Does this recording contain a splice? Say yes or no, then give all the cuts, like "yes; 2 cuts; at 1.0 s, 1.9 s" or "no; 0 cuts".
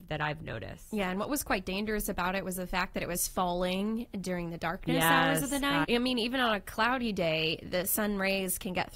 yes; 1 cut; at 5.8 s